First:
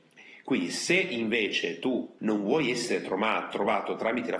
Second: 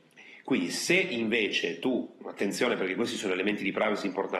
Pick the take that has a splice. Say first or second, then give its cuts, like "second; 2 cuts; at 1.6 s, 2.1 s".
first; 1 cut; at 2.2 s